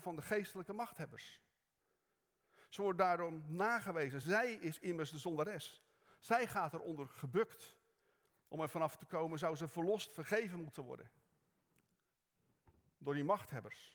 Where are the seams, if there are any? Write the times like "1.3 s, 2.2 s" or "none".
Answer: none